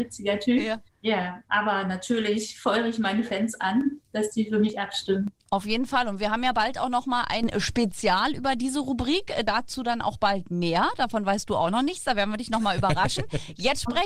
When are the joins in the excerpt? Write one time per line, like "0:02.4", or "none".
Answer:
none